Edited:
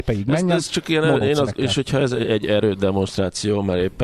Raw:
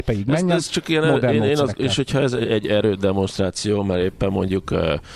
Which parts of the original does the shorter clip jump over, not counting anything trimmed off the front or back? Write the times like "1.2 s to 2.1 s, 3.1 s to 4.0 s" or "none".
1.2 s to 1.4 s